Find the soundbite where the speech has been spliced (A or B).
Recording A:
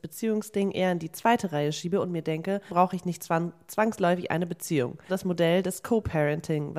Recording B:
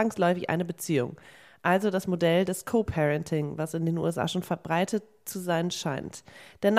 A